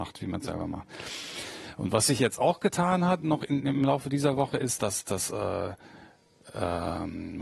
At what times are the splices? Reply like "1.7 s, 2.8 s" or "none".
none